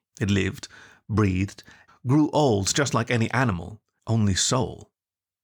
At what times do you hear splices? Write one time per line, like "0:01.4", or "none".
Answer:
0:01.9
0:04.0